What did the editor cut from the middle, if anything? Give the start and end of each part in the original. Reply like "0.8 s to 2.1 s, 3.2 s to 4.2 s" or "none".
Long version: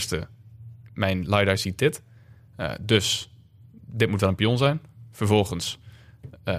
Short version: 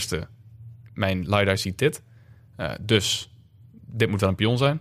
none